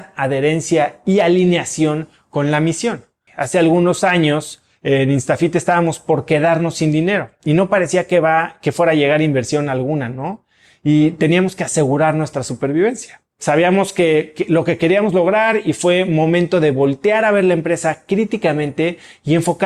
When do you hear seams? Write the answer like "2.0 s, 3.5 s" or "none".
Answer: 3.3 s